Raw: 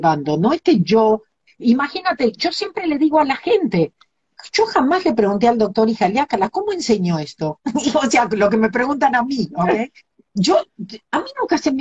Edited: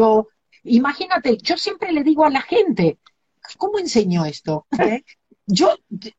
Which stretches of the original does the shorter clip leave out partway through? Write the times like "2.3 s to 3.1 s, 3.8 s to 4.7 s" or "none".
4.5 s to 6.5 s, 7.7 s to 9.7 s